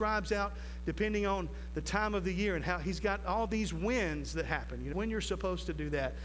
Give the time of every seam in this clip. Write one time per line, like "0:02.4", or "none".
0:04.9

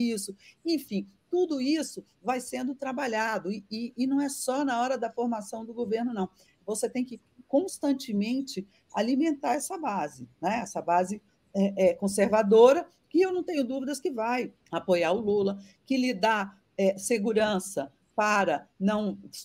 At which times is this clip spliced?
0:14.6

